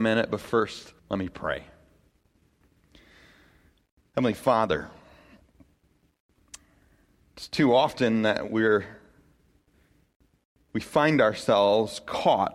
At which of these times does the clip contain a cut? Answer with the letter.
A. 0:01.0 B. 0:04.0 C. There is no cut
A